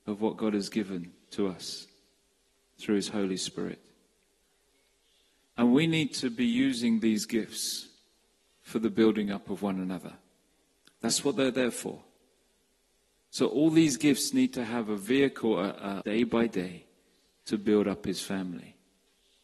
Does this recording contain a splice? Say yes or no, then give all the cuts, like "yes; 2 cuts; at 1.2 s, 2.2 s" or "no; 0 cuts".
yes; 1 cut; at 16.0 s